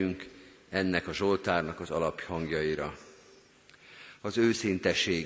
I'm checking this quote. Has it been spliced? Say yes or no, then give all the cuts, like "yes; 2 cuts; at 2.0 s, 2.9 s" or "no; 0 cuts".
no; 0 cuts